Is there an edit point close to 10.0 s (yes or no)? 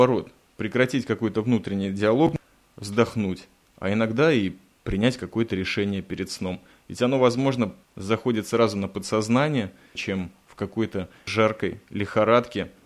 yes